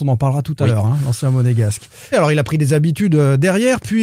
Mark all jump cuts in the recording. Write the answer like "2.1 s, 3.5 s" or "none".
2.1 s